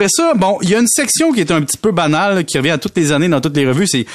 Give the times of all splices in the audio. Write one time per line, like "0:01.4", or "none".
none

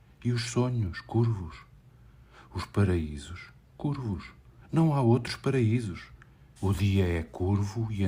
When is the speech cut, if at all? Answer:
0:06.6

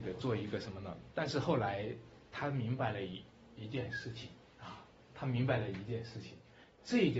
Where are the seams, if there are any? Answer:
0:01.1

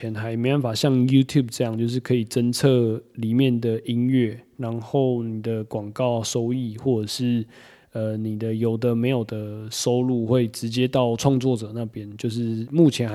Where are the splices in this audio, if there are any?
none

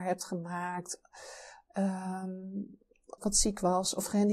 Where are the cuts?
0:03.2

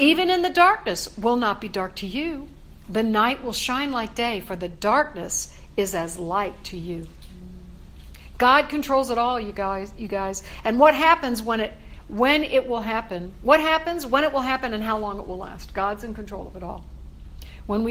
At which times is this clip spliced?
none

